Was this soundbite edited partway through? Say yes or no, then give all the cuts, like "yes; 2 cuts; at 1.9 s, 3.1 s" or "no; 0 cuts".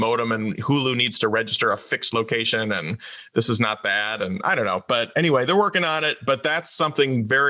no; 0 cuts